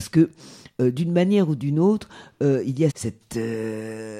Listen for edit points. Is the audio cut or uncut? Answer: cut